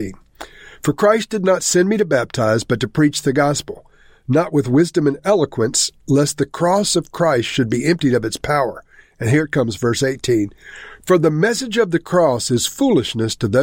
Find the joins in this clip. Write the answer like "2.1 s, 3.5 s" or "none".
none

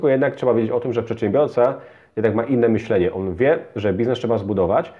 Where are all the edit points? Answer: none

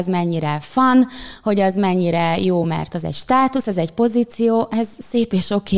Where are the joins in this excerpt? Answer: none

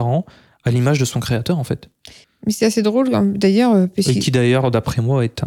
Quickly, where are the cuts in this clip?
2.2 s

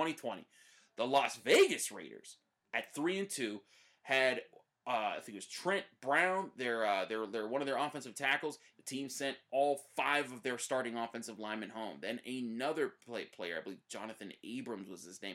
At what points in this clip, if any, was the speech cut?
8.7 s

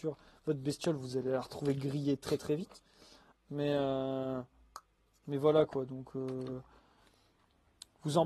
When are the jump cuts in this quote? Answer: 3.3 s

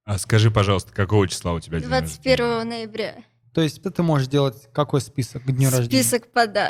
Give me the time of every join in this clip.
3.8 s

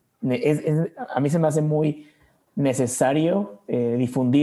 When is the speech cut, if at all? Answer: none

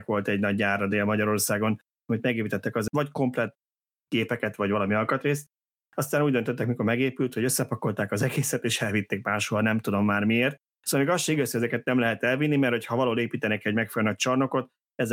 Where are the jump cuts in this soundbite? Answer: 2.9 s

